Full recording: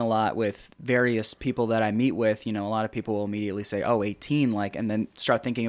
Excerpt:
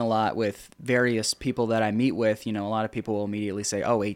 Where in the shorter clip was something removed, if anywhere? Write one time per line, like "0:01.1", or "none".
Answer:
none